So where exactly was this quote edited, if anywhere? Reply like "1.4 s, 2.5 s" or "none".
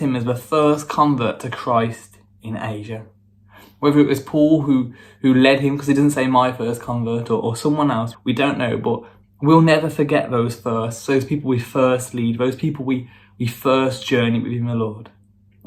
8.1 s